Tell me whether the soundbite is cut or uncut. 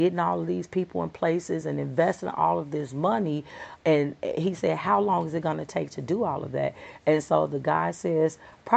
uncut